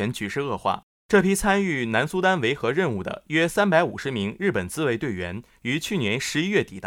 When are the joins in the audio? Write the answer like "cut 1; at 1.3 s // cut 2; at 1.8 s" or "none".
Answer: cut 1; at 0.9 s